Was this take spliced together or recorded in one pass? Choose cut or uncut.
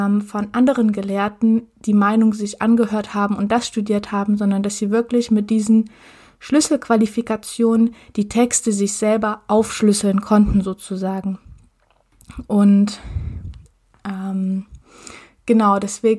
uncut